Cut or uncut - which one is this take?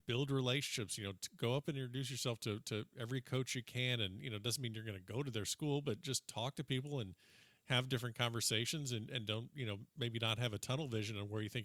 uncut